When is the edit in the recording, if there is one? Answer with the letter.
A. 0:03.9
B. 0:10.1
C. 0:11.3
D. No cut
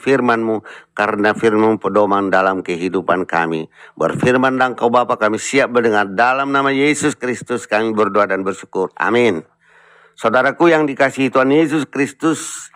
D